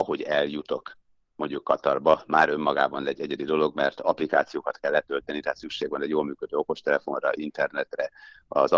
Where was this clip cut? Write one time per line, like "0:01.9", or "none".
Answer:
none